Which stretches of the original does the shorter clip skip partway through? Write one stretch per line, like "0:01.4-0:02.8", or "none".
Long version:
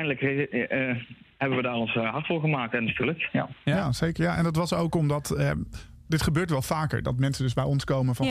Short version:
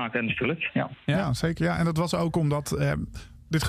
none